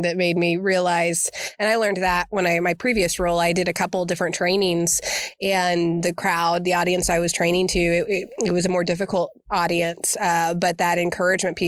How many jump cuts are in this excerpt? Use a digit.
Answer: 0